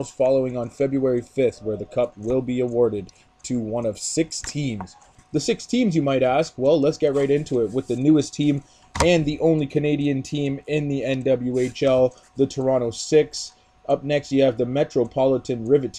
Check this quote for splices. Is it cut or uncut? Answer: uncut